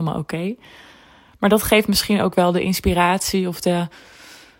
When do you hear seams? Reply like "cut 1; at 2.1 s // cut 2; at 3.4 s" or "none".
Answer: none